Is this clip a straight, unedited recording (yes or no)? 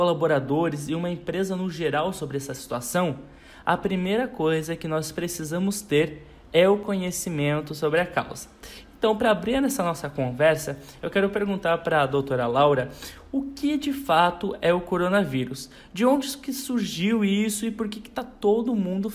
yes